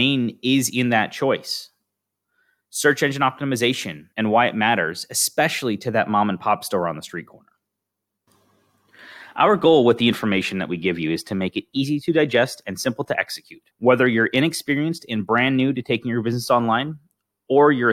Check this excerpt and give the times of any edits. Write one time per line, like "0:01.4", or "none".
0:13.7